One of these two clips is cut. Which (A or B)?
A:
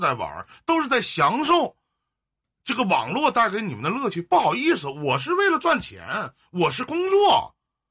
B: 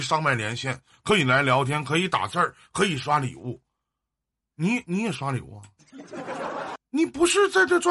B